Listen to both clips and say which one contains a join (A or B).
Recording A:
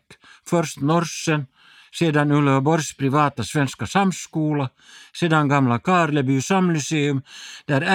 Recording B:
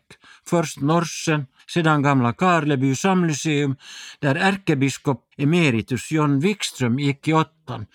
B